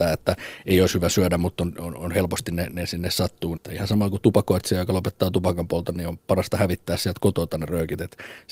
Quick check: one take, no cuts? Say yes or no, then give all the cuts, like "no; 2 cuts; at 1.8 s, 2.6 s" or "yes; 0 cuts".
no; 1 cut; at 3.6 s